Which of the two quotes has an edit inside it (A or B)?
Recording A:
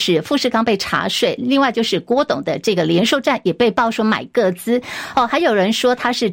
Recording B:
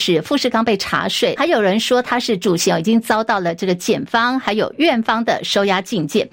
B